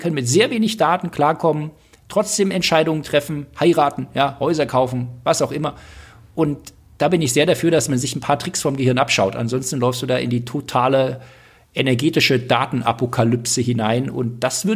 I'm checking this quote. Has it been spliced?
no; 0 cuts

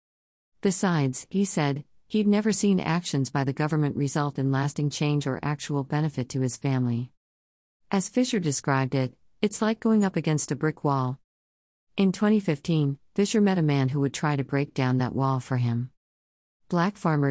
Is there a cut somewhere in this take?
no; 0 cuts

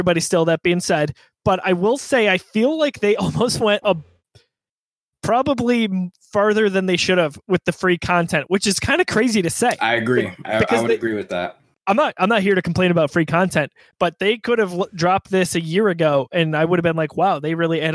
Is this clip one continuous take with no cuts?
yes; 0 cuts

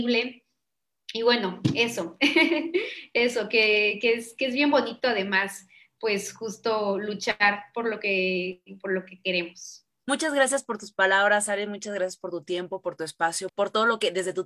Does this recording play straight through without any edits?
no; 2 cuts; at 10.0 s, 13.5 s

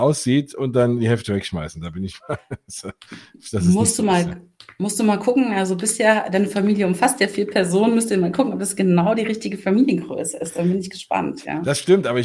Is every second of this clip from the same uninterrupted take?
yes; 0 cuts

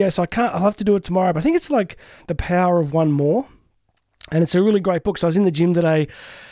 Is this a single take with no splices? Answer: no; 1 cut; at 2.2 s

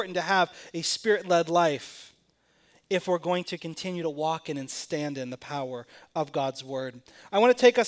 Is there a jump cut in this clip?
no; 0 cuts

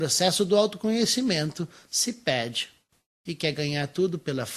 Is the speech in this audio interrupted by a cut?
no; 0 cuts

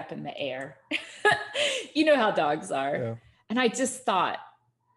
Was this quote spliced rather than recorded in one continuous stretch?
no; 0 cuts

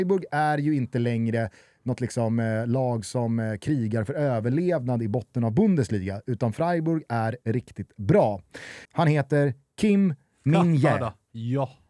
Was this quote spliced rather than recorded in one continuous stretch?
yes; 2 cuts; at 7.4 s, 8.8 s

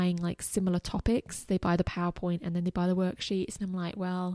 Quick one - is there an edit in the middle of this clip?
no; 0 cuts

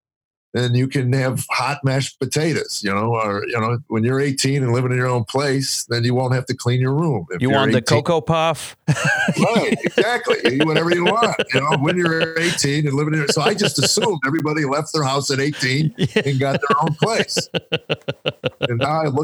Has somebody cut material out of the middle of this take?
no; 0 cuts

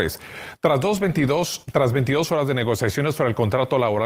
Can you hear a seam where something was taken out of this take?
no; 0 cuts

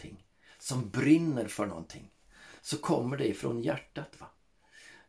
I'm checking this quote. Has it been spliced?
yes; 1 cut; at 2.6 s

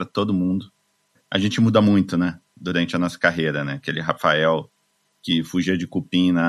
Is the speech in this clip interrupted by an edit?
no; 0 cuts

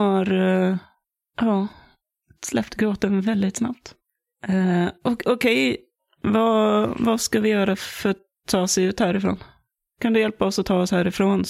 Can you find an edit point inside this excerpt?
no; 0 cuts

